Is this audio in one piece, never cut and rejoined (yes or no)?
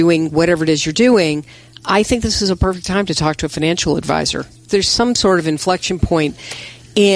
no